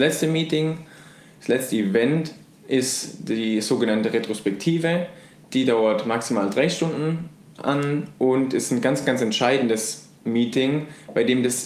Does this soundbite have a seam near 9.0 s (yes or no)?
no